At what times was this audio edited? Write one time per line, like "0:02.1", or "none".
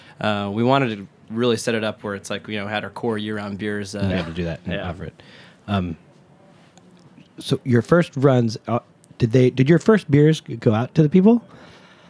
0:04.1